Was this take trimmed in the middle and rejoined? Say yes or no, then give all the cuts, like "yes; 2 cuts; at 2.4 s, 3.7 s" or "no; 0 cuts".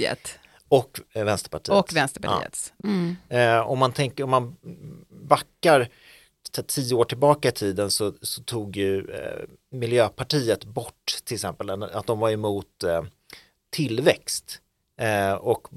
yes; 1 cut; at 2.8 s